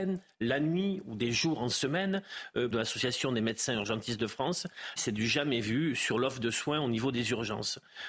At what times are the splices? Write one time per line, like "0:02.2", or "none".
0:02.7
0:05.0